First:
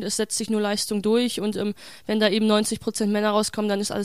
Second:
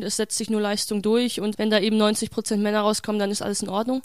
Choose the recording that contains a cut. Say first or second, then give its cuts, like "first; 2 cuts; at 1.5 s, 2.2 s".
second; 1 cut; at 1.5 s